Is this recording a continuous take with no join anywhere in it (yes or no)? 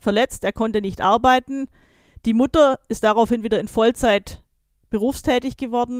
yes